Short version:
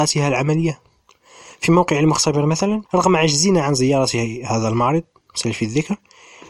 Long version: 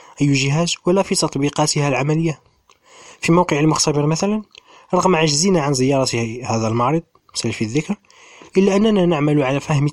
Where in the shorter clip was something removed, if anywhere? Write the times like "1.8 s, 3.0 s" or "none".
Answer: 2.9 s